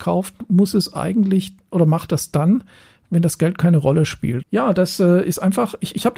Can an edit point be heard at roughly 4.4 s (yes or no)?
yes